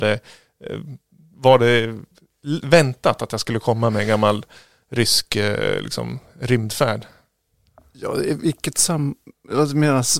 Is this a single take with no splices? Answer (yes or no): yes